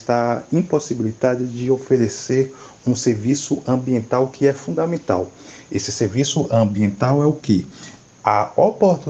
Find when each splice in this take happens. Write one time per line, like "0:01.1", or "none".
none